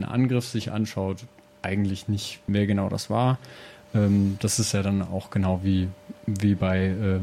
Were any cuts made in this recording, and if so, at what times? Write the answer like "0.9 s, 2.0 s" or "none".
2.5 s